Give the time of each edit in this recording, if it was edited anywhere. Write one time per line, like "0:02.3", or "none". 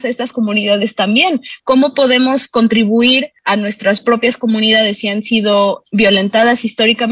none